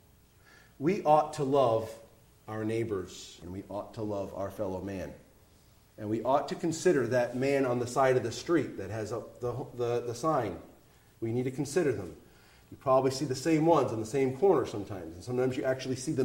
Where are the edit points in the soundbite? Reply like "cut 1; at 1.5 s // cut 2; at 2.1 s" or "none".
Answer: cut 1; at 3.4 s